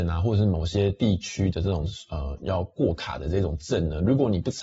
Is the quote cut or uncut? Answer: cut